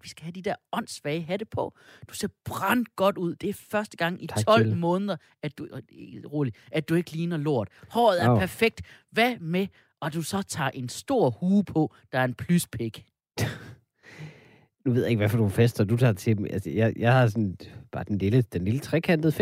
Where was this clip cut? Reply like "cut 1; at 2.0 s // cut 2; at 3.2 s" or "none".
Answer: cut 1; at 2.1 s